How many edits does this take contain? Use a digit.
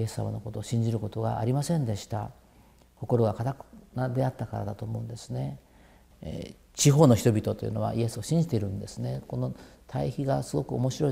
1